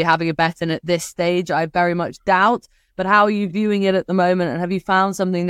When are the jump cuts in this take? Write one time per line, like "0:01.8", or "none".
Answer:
none